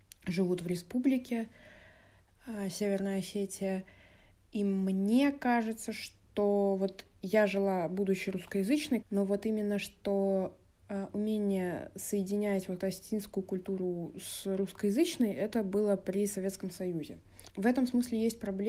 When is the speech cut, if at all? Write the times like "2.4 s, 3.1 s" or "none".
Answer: 9.0 s, 12.8 s, 17.5 s